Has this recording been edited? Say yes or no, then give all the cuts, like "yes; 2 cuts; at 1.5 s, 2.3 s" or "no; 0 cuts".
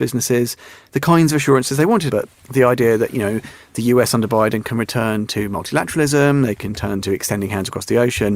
yes; 1 cut; at 2.1 s